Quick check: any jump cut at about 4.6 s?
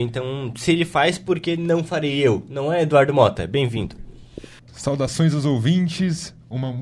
yes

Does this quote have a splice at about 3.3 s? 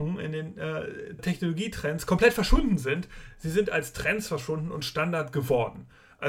no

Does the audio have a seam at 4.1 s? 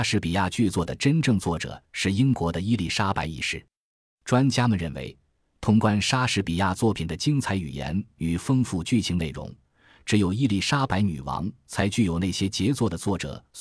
no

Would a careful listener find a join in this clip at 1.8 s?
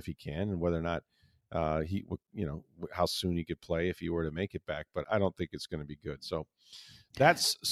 no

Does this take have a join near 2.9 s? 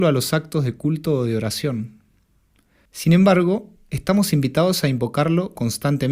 yes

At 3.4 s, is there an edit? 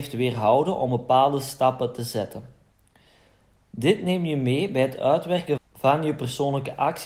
no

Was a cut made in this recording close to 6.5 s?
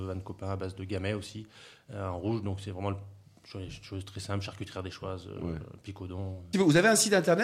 yes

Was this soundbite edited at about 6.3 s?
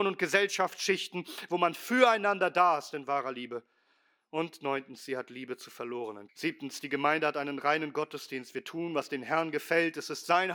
yes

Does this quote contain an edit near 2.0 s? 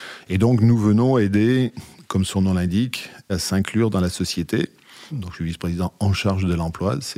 no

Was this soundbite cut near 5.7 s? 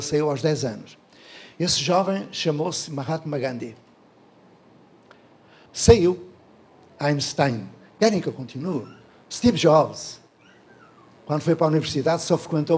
yes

